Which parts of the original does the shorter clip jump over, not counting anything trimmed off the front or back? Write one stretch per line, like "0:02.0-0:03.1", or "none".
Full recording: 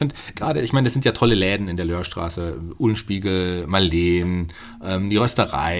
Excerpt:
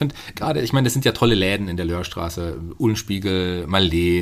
none